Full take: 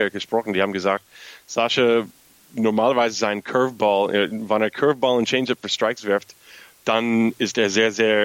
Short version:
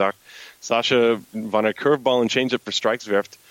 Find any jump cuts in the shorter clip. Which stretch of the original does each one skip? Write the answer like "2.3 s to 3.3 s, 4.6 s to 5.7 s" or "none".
2.2 s to 4.3 s